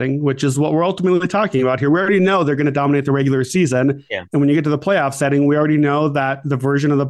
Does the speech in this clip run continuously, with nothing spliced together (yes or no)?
yes